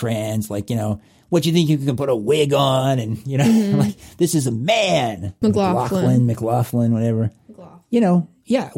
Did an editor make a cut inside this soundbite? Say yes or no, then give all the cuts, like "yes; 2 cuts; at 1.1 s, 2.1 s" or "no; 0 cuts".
yes; 1 cut; at 5.4 s